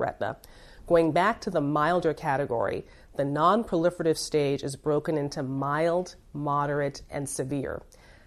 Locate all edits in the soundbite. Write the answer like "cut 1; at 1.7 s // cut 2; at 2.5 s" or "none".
none